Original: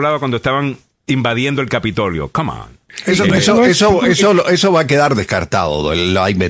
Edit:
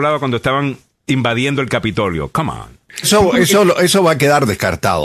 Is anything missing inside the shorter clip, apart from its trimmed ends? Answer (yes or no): yes